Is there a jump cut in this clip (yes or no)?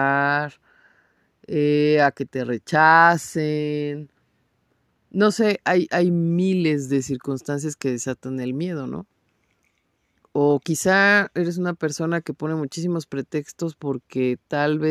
no